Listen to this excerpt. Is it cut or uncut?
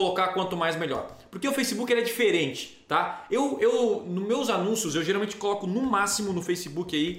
uncut